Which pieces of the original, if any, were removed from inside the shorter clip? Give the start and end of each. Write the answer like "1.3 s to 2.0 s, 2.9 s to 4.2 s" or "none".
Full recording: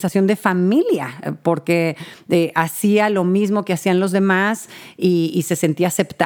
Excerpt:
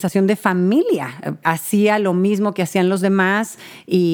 1.4 s to 2.5 s